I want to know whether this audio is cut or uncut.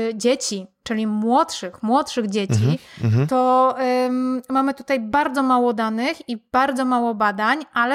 uncut